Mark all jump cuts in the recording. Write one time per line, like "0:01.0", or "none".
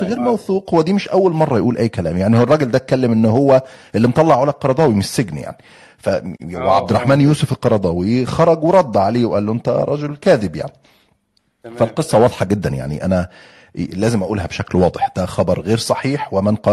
none